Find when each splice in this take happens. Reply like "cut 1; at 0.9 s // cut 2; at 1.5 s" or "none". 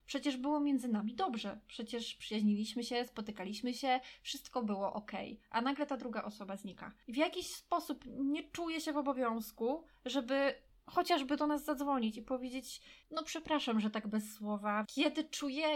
cut 1; at 13.0 s // cut 2; at 14.8 s